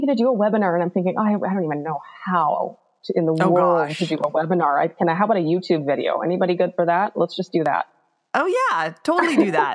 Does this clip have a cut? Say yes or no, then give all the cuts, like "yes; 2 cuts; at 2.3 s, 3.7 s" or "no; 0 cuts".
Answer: no; 0 cuts